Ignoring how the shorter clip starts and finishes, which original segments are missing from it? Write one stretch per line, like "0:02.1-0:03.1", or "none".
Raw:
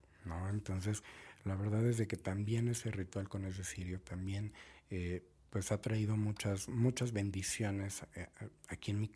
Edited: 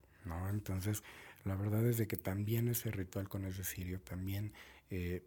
none